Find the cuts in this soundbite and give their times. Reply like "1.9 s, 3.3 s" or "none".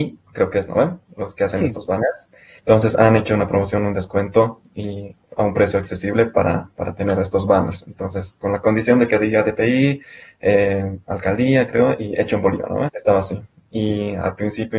2.6 s, 12.9 s

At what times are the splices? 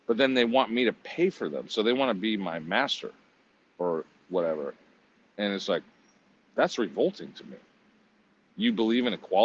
none

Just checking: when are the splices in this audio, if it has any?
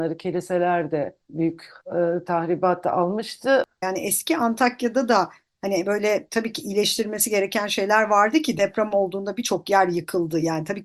1.2 s, 3.8 s

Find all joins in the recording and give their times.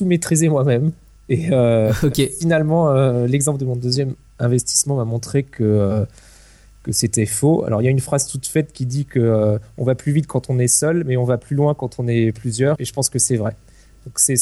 12.8 s

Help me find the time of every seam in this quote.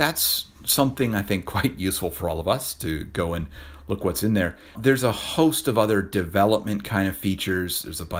4.7 s

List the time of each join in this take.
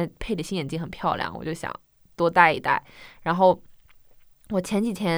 none

